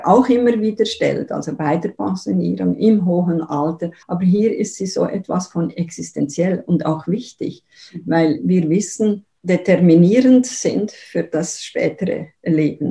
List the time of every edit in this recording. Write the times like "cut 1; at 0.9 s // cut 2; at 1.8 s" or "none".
cut 1; at 4.0 s // cut 2; at 9.3 s

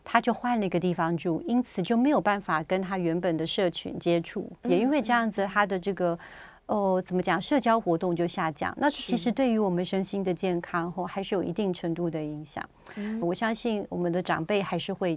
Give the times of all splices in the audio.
cut 1; at 13.2 s

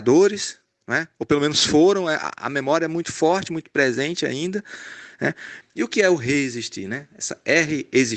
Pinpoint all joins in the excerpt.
cut 1; at 5.6 s

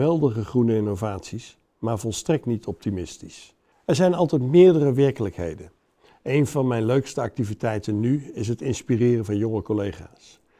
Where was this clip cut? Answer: cut 1; at 3.7 s

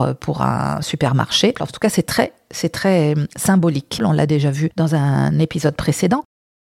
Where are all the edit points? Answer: cut 1; at 1.6 s // cut 2; at 4.0 s

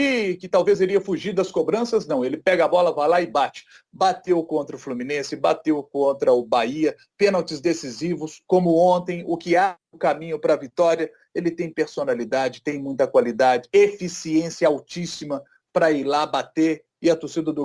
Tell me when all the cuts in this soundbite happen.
none

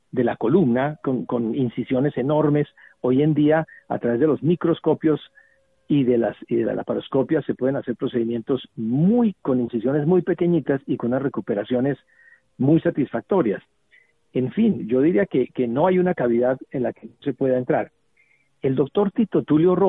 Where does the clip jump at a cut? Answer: cut 1; at 1.0 s

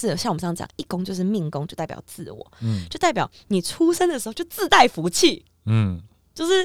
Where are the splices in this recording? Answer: none

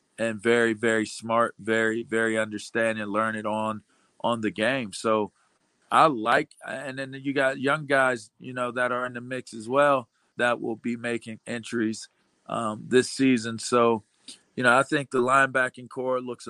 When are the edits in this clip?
cut 1; at 10.3 s

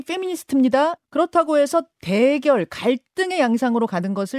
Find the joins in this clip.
cut 1; at 1.0 s

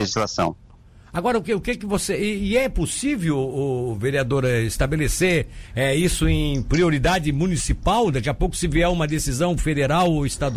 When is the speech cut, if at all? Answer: none

